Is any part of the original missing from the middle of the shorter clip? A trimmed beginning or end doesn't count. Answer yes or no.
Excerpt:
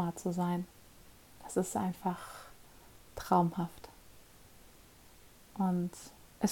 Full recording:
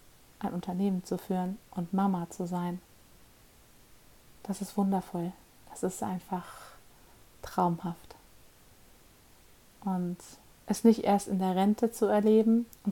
yes